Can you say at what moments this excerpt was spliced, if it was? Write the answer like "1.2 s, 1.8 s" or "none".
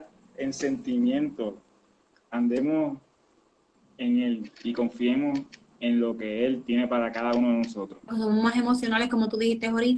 8.1 s